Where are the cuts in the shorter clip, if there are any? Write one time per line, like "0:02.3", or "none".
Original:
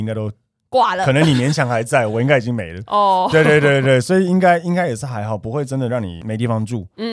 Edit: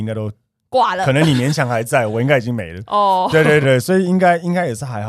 0:03.6